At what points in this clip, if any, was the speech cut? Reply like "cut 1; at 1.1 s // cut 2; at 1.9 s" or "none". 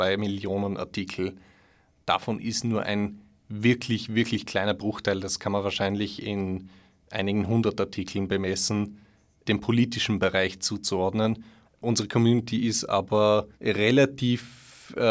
cut 1; at 11.6 s // cut 2; at 13.5 s